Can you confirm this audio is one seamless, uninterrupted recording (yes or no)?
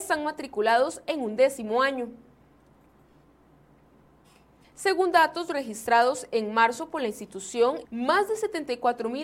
no